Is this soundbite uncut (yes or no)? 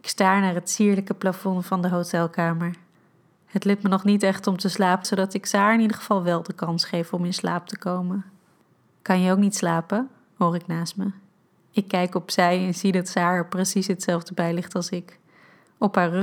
no